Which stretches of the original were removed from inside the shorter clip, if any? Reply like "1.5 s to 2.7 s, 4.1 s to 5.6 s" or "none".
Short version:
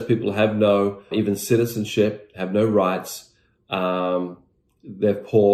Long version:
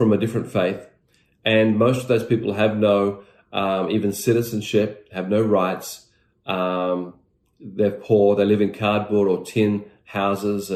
3.3 s to 3.9 s